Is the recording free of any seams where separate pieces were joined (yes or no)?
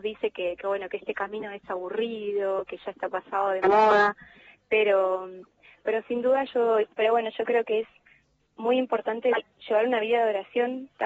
no